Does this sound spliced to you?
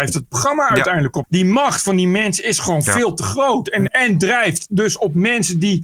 yes; 2 cuts; at 1.2 s, 3.9 s

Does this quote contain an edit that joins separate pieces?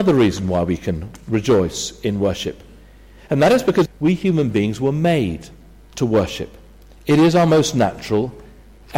yes; 1 cut; at 3.9 s

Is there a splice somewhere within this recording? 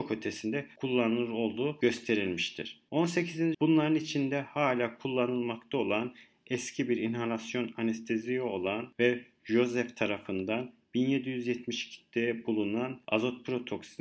yes; 1 cut; at 3.5 s

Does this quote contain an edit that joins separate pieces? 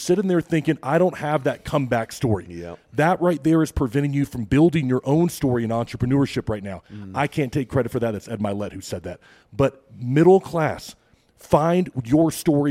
no; 0 cuts

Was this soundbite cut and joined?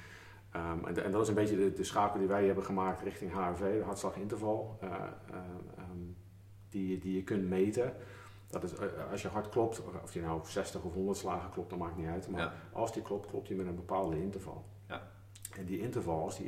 no; 0 cuts

